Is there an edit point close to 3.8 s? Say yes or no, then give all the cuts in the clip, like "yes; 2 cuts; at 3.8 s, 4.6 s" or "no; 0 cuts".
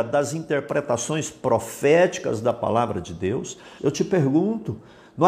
yes; 1 cut; at 3.8 s